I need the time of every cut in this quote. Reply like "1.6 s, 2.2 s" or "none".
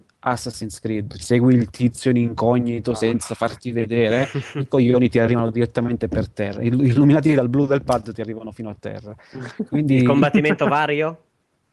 1.2 s

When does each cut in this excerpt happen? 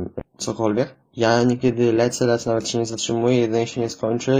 none

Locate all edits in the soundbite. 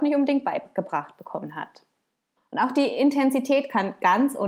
2.4 s

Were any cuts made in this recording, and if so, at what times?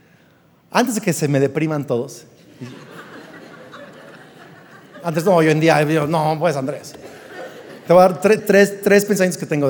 8.4 s

